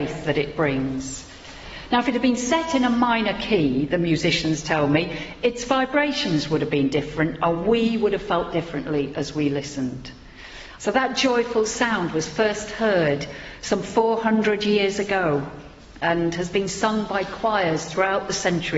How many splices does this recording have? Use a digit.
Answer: 1